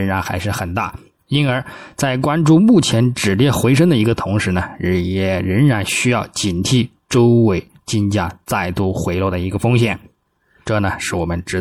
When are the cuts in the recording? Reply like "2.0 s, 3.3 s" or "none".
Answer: 10.6 s